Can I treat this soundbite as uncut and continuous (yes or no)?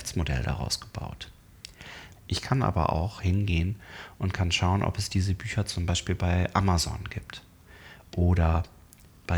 no